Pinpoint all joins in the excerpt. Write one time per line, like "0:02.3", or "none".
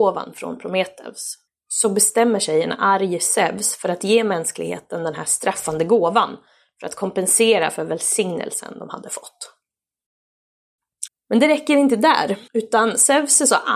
0:11.1
0:12.5